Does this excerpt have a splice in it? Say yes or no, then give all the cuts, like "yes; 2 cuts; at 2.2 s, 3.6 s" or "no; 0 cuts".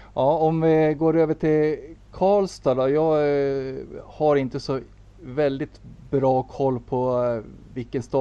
no; 0 cuts